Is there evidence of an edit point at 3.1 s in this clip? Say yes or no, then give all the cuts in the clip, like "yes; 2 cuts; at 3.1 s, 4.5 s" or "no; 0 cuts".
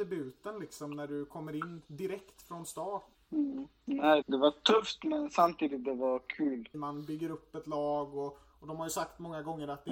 yes; 3 cuts; at 3.1 s, 4.2 s, 6.7 s